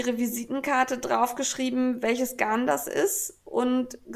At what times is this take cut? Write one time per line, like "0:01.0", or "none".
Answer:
none